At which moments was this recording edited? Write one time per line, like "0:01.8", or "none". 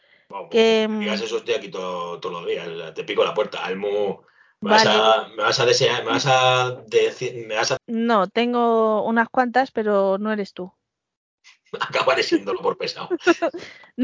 0:07.8